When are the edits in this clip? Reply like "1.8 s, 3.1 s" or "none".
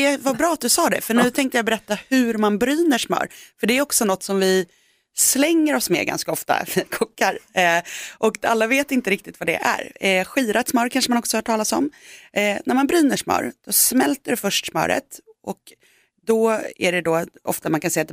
none